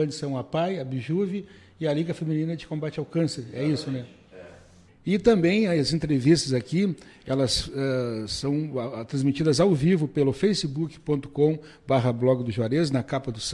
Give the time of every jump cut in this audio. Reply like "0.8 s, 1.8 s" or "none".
4.9 s

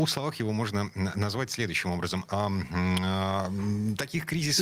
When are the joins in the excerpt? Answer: 2.2 s

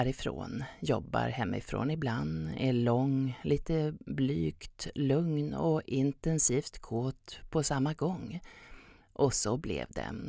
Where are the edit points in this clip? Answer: 9.0 s

